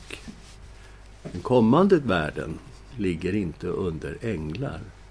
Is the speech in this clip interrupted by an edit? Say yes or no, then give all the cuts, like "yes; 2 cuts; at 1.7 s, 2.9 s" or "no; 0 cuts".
yes; 1 cut; at 2.9 s